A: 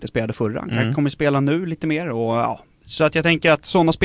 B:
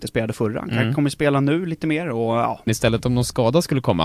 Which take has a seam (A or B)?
B